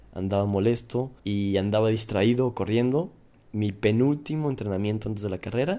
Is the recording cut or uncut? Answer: cut